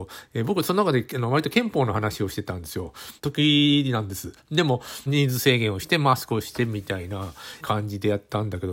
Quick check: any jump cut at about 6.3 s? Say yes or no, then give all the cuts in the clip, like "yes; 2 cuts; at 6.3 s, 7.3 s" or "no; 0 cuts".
no; 3 cuts; at 3.2 s, 5.1 s, 7.6 s